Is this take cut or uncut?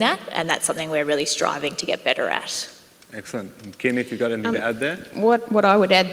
uncut